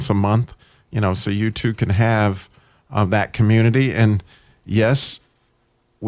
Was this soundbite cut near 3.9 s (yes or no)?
no